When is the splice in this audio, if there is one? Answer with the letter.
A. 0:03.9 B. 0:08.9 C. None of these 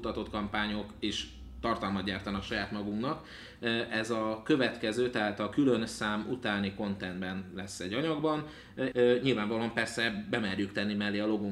B